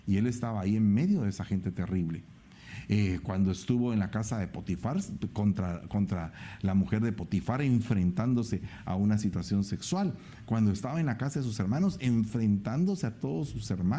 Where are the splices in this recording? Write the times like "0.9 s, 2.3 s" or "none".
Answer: none